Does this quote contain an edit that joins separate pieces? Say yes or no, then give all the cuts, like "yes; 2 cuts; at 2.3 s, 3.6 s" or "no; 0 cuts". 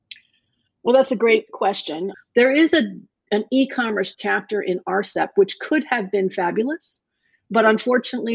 yes; 1 cut; at 2.1 s